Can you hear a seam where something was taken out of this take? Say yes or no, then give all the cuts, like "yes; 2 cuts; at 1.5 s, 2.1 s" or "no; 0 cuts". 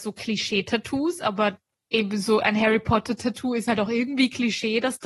no; 0 cuts